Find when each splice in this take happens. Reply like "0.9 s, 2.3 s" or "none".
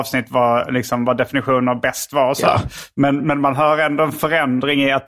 none